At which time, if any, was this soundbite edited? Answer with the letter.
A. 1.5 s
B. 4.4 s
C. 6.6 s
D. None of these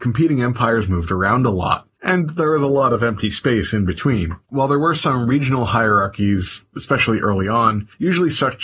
B